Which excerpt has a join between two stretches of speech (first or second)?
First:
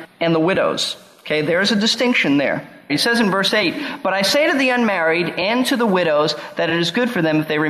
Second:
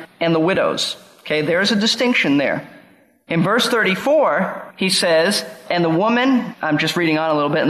first